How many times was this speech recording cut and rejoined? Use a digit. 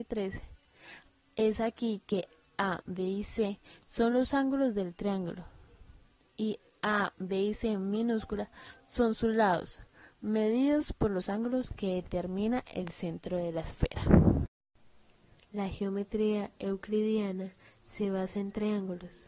1